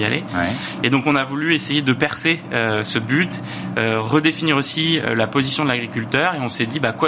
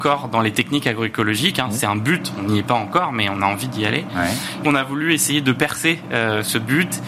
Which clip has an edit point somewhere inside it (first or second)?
second